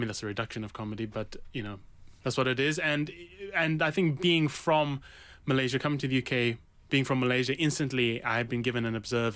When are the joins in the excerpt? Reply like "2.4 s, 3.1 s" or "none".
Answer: 2.2 s